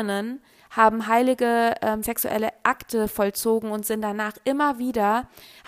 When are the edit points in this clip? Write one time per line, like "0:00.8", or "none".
none